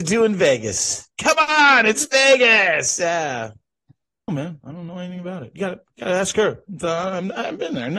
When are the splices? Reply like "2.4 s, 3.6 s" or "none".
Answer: 4.3 s